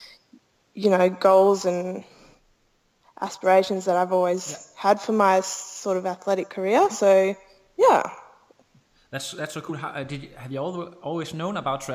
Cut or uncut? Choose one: uncut